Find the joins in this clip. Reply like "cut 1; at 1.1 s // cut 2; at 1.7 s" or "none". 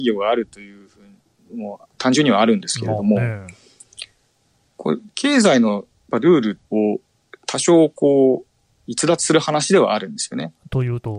cut 1; at 1.9 s // cut 2; at 6.7 s